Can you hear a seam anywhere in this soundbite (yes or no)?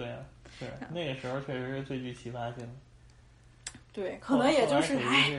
no